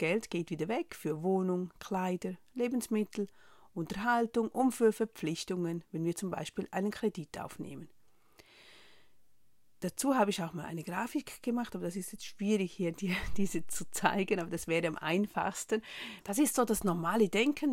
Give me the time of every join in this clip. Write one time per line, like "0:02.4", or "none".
0:16.2